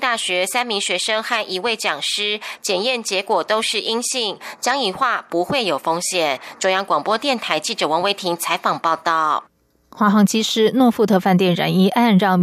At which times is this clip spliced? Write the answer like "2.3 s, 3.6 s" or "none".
none